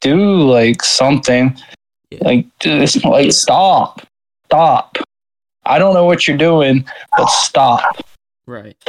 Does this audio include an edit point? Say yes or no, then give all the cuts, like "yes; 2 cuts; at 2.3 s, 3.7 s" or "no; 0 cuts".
no; 0 cuts